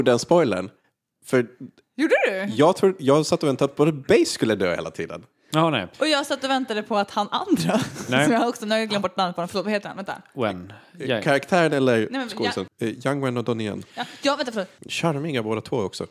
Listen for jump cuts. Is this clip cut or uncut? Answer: cut